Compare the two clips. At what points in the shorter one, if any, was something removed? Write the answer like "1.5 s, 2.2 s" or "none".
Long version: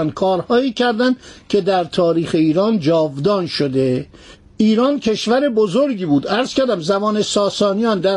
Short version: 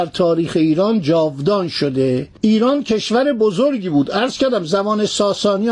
2.4 s